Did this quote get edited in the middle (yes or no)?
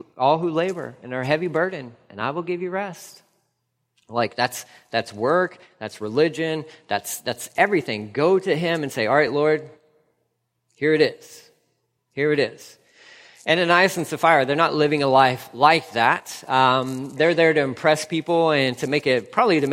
no